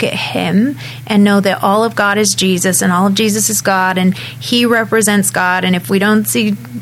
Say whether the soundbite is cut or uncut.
uncut